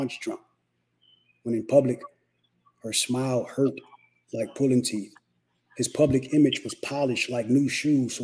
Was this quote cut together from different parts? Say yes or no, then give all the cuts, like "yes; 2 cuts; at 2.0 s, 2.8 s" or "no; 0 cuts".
no; 0 cuts